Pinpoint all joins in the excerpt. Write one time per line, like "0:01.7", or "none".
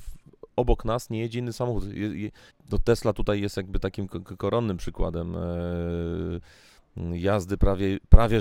0:02.5